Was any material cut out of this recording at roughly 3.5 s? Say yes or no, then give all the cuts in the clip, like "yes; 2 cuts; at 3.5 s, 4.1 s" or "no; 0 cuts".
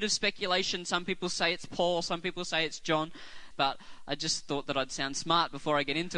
yes; 1 cut; at 3.5 s